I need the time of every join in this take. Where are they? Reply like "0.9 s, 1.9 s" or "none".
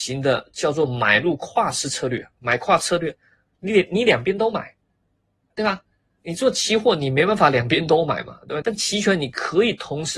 3.6 s, 8.6 s